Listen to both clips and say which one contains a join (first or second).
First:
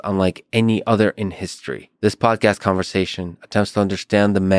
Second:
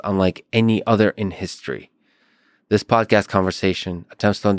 first